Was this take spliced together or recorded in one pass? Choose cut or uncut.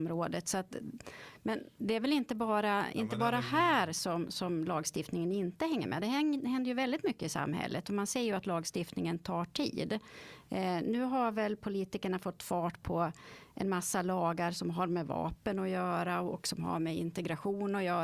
uncut